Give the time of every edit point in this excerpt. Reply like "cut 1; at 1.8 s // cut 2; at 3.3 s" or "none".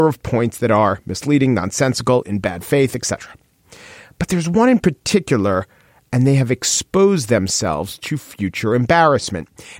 none

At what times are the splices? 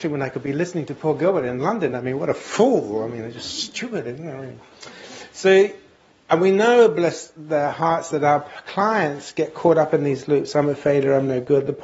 none

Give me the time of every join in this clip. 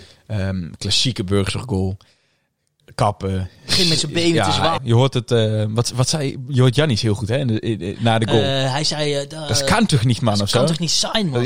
cut 1; at 4.8 s

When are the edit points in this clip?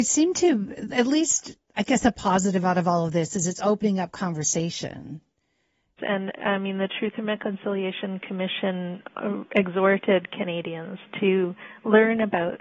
cut 1; at 6.0 s

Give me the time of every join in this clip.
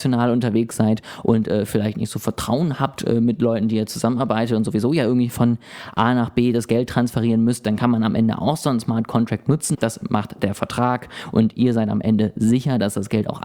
cut 1; at 9.7 s

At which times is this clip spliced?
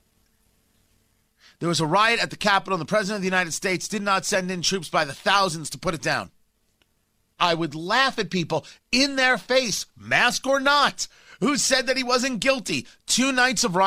cut 1; at 7.4 s

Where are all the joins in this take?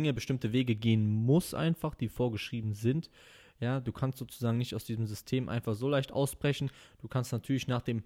none

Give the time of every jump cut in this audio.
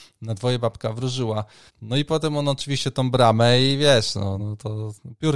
cut 1; at 1.7 s // cut 2; at 4.4 s

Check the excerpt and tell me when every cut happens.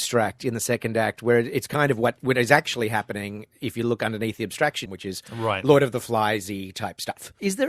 cut 1; at 4.9 s

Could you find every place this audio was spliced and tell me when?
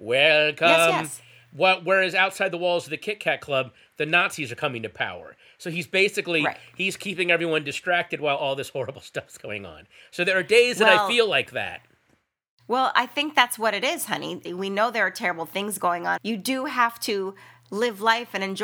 cut 1; at 14.4 s // cut 2; at 16.2 s

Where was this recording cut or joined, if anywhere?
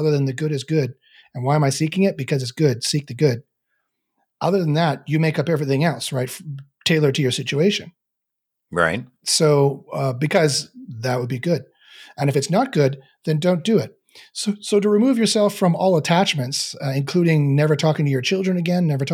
none

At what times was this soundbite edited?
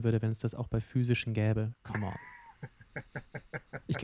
cut 1; at 1.7 s

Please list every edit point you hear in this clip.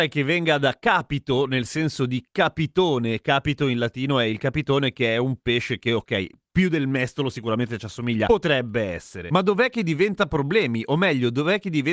none

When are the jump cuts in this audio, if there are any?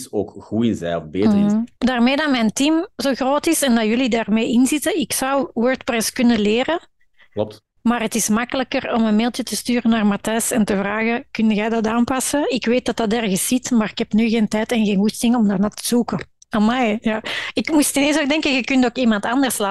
cut 1; at 1.8 s // cut 2; at 16.4 s

